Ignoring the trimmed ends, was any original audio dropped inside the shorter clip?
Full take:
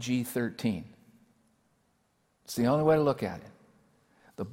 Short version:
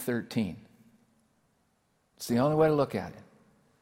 no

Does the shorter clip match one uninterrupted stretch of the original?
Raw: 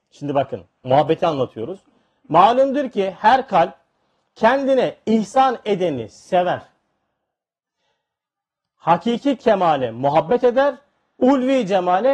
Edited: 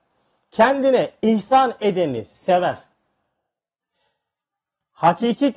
yes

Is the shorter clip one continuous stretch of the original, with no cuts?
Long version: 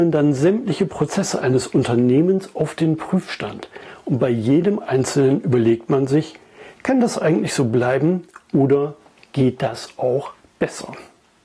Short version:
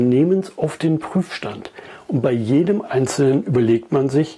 yes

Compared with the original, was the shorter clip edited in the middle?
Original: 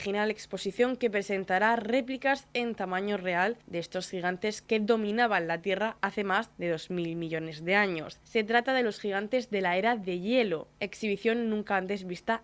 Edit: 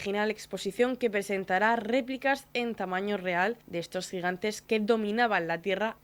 no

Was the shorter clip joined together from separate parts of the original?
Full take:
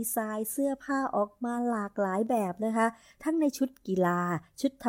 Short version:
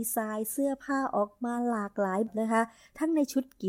yes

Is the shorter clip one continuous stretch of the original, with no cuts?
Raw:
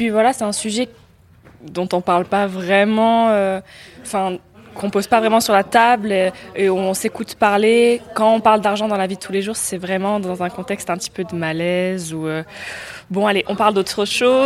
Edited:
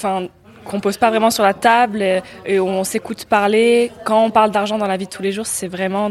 yes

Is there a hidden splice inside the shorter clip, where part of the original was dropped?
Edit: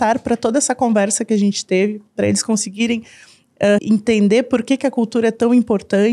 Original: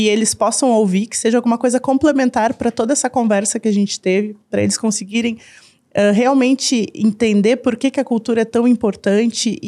yes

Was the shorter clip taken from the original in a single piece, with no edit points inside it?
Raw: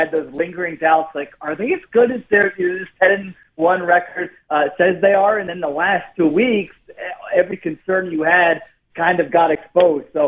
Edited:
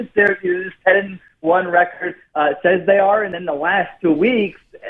yes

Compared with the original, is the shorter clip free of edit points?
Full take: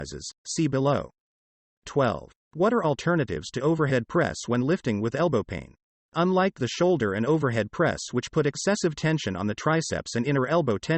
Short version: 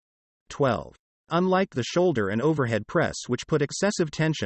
no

